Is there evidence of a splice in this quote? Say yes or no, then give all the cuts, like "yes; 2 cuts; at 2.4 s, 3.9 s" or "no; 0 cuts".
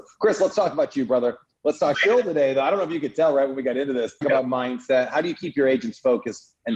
yes; 2 cuts; at 1.9 s, 4.2 s